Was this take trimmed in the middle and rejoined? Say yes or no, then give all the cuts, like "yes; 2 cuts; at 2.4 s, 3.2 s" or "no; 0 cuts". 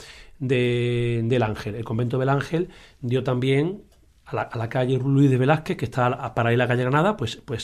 no; 0 cuts